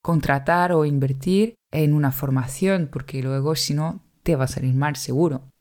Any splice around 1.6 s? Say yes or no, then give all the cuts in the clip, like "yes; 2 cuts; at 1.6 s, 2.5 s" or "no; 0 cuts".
yes; 1 cut; at 1.6 s